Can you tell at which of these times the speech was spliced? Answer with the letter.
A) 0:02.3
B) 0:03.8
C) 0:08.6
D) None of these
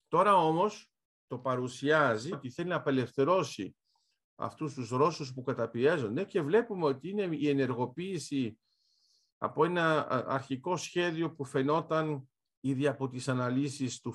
A